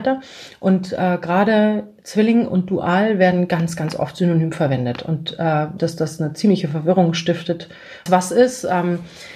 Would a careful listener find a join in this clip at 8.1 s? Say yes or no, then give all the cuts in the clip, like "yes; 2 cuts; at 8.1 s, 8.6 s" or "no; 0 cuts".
yes; 2 cuts; at 5.8 s, 8.1 s